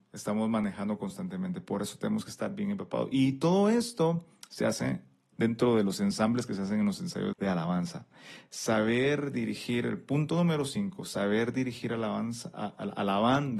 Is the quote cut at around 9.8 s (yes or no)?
no